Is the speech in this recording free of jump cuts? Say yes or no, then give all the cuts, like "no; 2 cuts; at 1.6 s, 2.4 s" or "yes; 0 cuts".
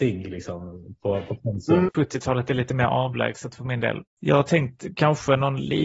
no; 2 cuts; at 1.9 s, 4.1 s